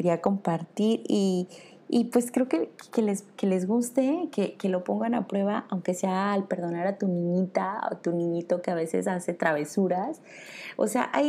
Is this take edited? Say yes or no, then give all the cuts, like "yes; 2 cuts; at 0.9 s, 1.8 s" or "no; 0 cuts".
no; 0 cuts